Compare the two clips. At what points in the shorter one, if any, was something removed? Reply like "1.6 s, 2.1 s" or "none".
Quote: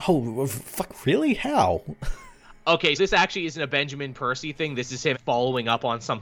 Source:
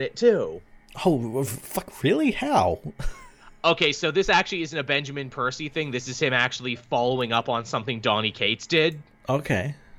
3.0 s, 5.1 s

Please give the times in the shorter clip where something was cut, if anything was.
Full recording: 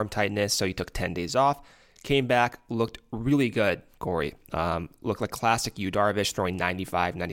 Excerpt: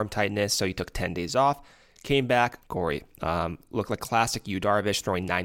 2.6 s

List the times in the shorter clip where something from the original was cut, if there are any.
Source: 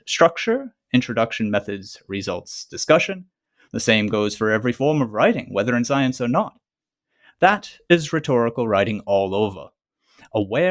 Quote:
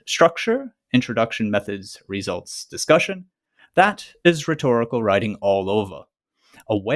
3.6 s

